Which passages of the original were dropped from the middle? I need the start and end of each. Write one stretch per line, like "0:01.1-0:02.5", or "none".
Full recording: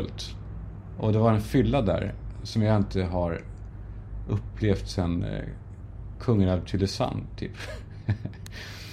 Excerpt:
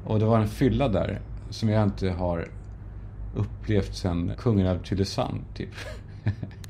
0:05.2-0:06.1